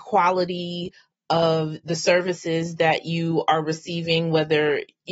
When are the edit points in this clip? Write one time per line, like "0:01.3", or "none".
none